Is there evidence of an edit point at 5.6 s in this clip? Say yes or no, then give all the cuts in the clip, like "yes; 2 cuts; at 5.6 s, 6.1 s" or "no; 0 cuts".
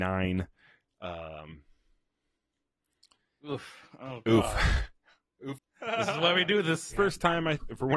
yes; 2 cuts; at 5.6 s, 6.9 s